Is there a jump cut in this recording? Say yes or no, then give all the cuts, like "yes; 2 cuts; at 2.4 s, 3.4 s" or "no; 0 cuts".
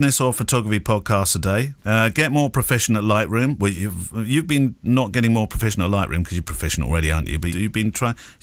yes; 2 cuts; at 6.4 s, 7.5 s